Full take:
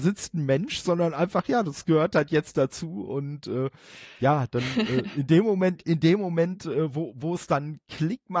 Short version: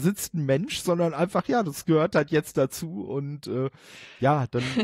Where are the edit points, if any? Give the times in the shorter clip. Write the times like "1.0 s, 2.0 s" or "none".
none

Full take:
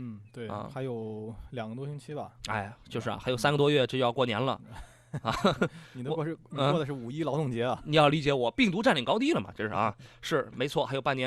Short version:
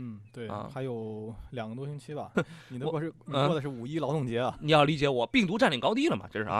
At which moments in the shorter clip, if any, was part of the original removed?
2.3 s

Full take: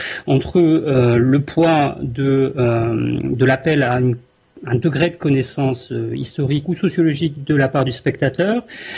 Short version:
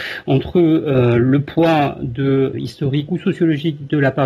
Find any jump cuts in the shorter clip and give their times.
2.5 s

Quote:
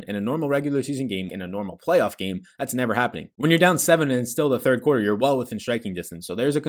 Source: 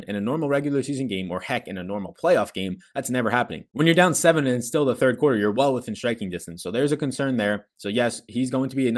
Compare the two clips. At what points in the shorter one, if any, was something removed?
1.3 s

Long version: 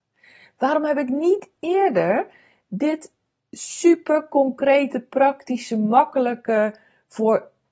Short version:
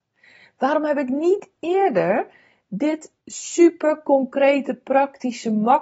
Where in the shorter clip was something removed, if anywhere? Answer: 3.2 s

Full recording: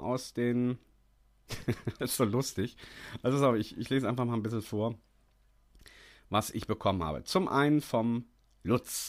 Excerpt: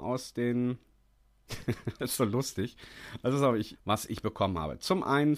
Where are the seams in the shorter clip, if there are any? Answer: 3.7 s

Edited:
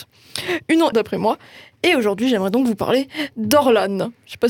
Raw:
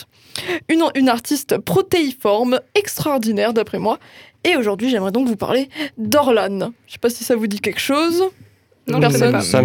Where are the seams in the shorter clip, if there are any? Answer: 0.9 s

